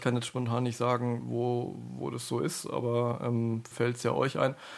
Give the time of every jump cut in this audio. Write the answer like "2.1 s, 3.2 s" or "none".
3.7 s